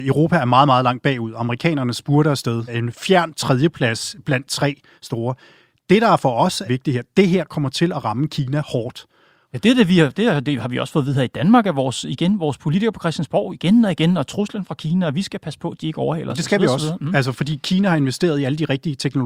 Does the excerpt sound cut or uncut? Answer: cut